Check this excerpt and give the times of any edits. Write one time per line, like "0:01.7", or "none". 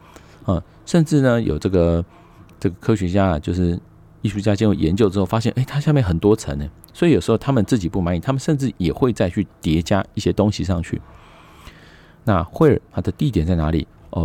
none